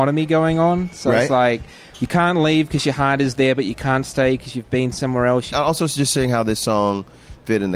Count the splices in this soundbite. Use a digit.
1